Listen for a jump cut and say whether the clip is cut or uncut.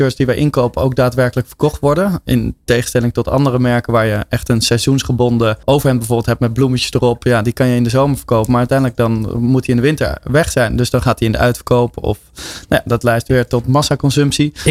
cut